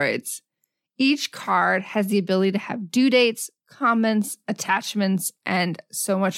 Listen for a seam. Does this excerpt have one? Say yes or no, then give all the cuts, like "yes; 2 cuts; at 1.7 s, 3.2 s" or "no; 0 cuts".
no; 0 cuts